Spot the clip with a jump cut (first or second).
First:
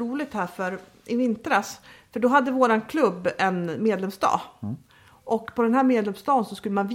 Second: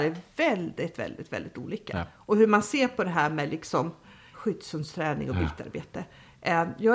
second